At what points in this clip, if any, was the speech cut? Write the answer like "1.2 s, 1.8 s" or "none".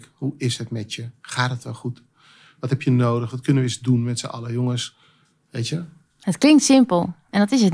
none